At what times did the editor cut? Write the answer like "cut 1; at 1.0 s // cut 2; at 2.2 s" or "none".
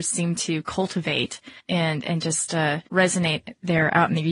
cut 1; at 1.6 s // cut 2; at 2.9 s